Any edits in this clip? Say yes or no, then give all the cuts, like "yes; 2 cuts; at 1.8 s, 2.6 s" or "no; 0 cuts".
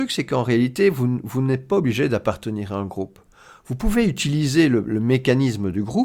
no; 0 cuts